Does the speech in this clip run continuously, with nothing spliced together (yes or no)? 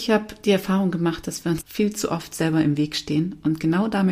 no